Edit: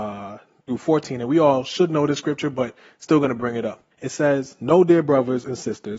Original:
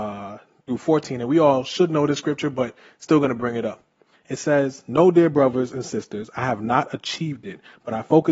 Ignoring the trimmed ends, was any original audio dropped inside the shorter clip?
yes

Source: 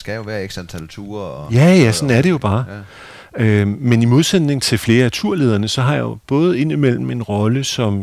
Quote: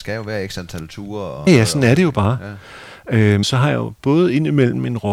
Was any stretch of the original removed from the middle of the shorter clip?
yes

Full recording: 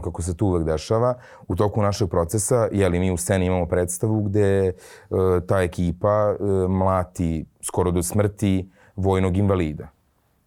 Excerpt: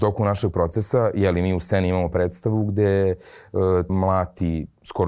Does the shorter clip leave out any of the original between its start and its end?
yes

